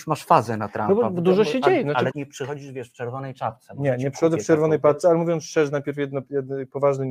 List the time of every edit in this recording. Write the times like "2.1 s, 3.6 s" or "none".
2.1 s

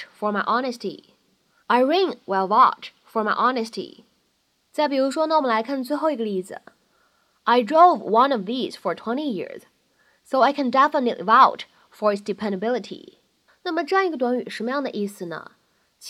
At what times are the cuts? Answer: 1.6 s, 13.5 s

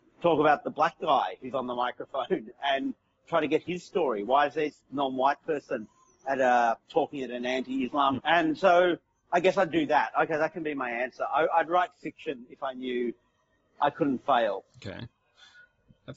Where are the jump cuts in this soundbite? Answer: 8.2 s

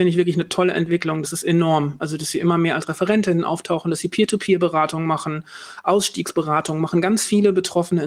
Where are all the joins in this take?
none

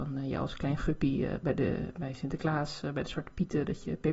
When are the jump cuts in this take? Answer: none

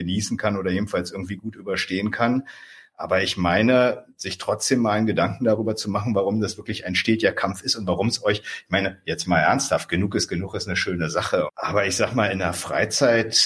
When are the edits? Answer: 11.5 s

